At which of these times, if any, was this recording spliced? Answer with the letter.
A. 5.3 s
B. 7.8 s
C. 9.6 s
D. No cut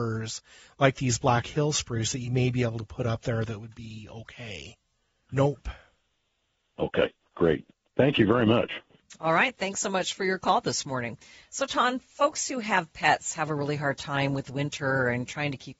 A